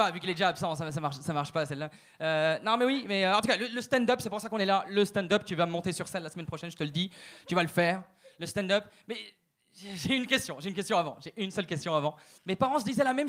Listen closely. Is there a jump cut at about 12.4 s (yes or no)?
yes